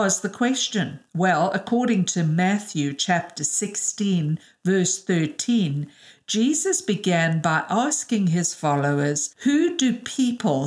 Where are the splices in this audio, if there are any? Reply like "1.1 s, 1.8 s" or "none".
none